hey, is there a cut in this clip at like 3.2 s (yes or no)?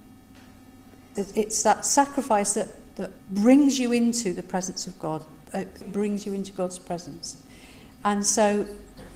yes